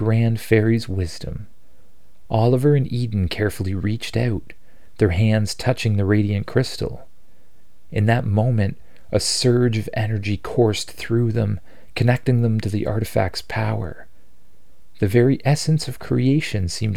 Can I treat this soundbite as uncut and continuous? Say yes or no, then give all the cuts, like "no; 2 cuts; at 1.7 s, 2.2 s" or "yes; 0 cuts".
yes; 0 cuts